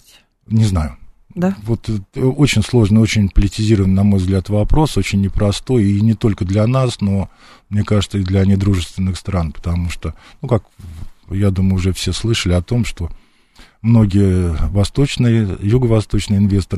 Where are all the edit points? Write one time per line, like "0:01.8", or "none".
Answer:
none